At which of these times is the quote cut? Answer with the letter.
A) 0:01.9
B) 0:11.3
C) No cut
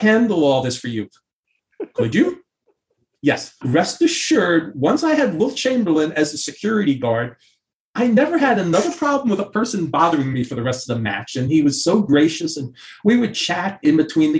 C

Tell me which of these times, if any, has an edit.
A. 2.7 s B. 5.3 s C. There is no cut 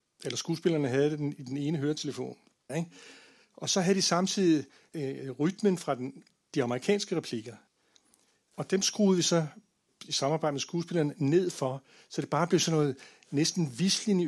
A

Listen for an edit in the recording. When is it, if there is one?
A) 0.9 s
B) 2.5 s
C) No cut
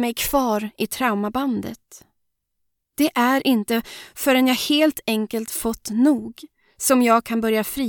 C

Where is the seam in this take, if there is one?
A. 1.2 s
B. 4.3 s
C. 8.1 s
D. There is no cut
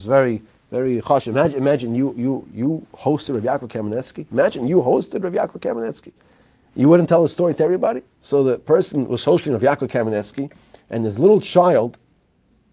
C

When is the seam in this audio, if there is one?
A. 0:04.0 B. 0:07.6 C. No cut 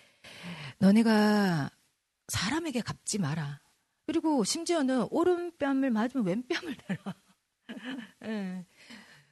A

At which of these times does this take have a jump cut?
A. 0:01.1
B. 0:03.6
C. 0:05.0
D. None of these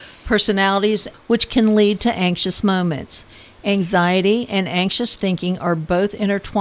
A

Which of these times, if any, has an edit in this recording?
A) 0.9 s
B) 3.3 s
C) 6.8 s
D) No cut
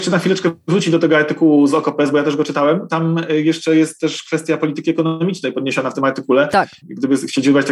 C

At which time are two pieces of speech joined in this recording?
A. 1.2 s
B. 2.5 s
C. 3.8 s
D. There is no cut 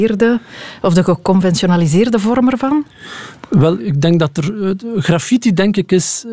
C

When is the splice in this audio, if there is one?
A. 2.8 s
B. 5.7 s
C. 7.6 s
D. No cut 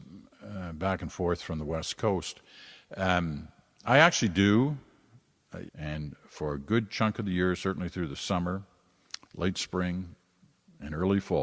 B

